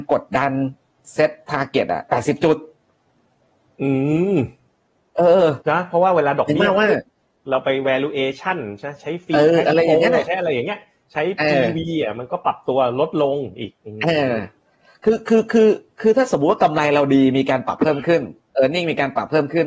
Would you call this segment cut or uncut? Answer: cut